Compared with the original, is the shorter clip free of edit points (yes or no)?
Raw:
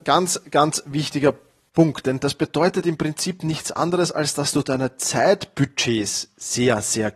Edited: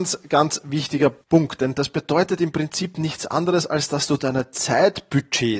no